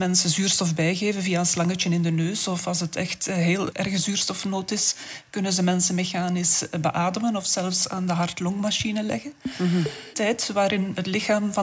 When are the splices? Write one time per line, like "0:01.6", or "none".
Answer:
0:10.1